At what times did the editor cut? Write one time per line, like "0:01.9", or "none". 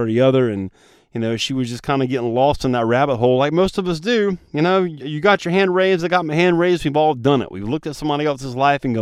none